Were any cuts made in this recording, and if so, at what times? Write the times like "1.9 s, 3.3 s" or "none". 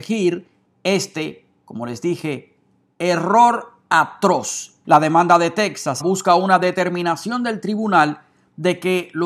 4.8 s, 6.0 s

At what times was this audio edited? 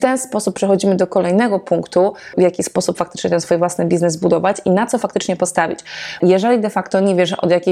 2.3 s, 6.2 s

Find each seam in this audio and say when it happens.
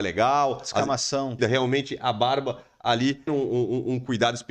1.4 s, 3.3 s

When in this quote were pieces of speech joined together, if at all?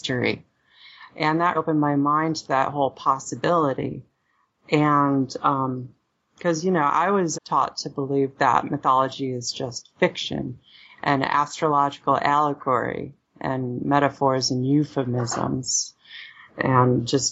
1.5 s, 7.3 s

